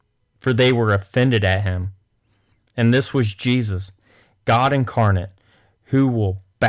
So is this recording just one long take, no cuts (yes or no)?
yes